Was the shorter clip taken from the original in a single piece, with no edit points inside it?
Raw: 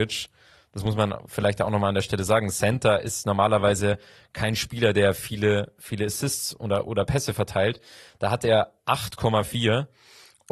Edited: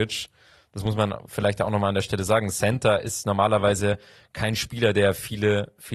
yes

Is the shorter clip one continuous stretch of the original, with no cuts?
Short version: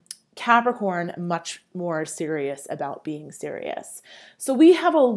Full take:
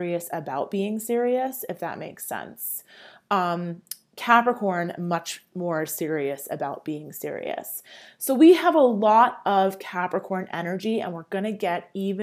yes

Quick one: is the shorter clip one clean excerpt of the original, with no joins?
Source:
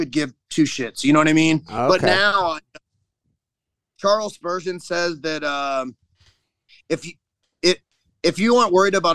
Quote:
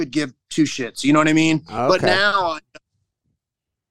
yes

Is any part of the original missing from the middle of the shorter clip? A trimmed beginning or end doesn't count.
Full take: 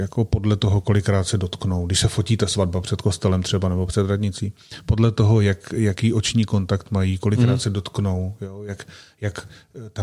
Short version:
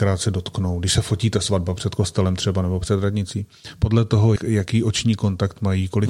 yes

